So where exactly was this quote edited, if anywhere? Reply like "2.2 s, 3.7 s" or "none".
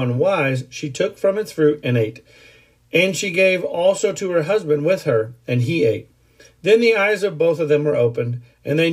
none